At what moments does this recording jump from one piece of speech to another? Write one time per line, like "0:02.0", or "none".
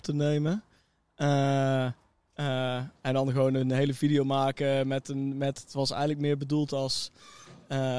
none